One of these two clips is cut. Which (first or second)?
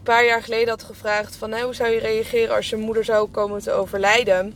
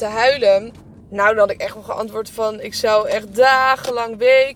second